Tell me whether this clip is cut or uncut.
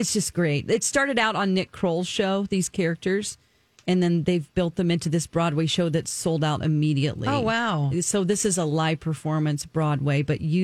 uncut